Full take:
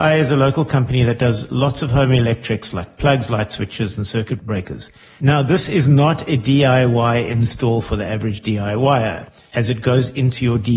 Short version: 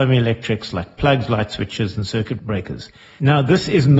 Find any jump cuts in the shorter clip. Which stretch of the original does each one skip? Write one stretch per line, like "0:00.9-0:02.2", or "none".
none

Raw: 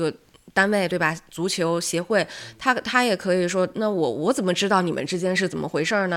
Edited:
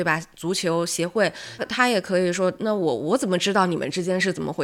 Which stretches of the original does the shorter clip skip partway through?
0:02.5-0:02.7

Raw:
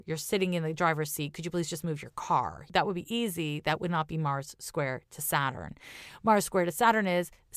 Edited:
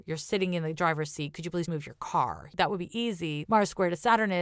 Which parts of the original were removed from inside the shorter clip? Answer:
0:01.7-0:01.8
0:03.6-0:06.2

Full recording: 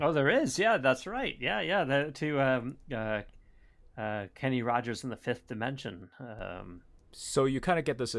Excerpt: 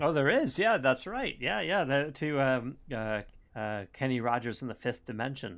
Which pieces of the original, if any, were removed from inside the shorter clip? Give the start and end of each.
0:03.5-0:03.9

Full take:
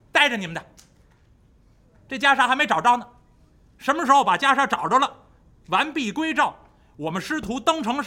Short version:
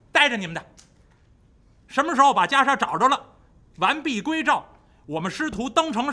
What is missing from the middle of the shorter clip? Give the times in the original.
0:01.8-0:03.7

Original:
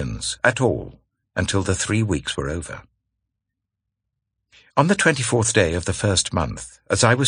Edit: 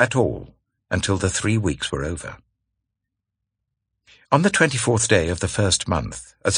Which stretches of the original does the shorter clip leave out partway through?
none

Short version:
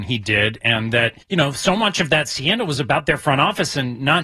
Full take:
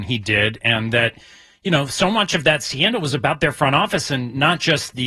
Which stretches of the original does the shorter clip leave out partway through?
0:01.2-0:01.6

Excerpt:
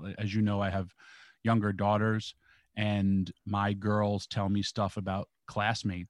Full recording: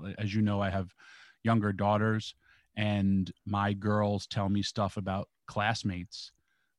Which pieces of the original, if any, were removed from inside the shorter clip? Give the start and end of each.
none

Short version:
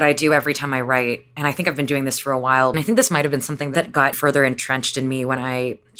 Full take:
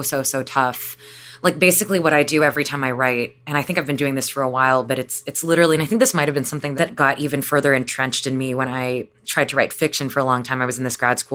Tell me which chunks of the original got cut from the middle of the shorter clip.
0:04.8-0:05.8
0:07.2-0:07.4

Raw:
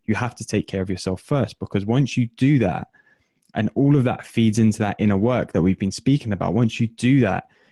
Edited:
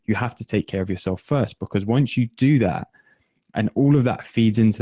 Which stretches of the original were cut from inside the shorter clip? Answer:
none

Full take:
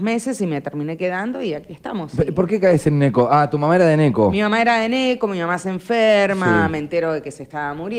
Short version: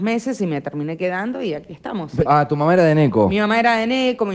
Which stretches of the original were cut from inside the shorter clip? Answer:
0:02.3-0:03.3

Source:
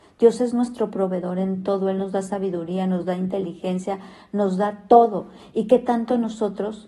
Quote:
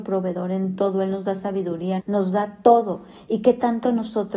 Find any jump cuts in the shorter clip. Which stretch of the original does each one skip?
0:02.8-0:04.2

